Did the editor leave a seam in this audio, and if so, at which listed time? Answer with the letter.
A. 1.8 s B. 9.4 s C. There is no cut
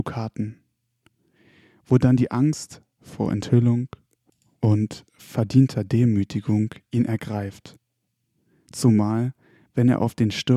C